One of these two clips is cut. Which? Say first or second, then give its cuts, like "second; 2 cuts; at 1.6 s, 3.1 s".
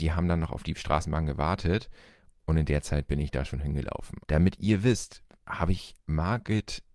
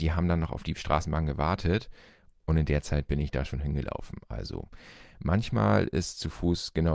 first; 2 cuts; at 4.2 s, 5.4 s